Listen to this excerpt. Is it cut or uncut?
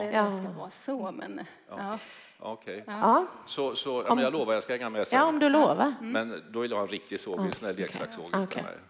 uncut